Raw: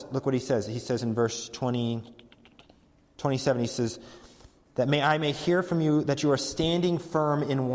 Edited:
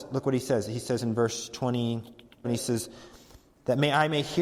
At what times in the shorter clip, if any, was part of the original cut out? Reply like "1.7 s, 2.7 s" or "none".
2.4 s